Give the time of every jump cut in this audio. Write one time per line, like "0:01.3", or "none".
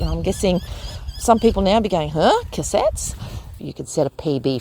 0:03.6